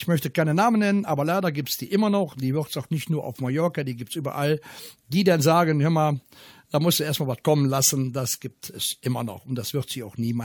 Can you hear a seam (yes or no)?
no